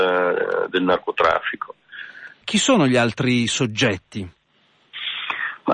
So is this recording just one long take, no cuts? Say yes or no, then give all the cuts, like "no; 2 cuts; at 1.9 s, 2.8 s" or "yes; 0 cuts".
no; 1 cut; at 2.4 s